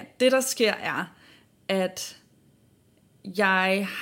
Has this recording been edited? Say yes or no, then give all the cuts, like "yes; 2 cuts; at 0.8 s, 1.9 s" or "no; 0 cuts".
no; 0 cuts